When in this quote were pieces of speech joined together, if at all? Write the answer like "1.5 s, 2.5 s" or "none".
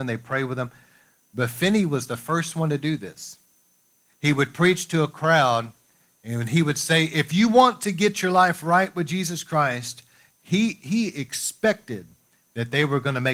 none